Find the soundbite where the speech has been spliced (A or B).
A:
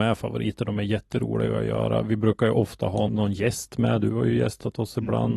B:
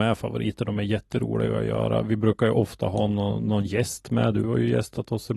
A